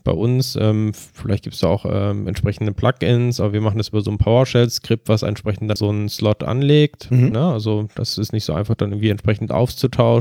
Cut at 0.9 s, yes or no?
no